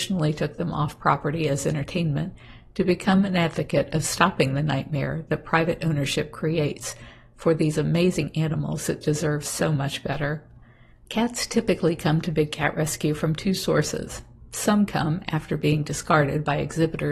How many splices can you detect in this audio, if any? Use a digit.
1